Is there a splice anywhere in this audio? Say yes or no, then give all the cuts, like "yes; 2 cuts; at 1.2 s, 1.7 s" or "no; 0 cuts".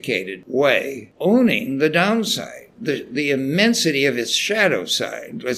no; 0 cuts